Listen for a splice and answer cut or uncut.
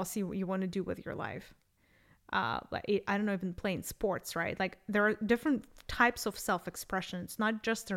uncut